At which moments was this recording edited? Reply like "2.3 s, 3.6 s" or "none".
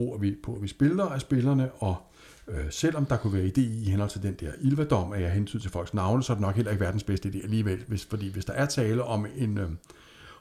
none